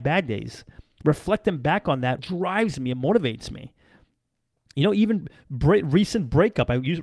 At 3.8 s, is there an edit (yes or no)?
no